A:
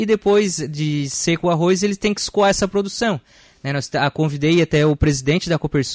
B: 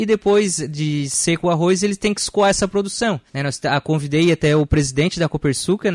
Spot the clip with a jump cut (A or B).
B